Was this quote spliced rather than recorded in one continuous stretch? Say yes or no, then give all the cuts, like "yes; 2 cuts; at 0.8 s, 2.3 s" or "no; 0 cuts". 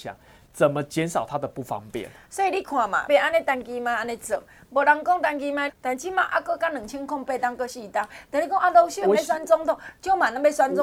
yes; 2 cuts; at 3.1 s, 5.7 s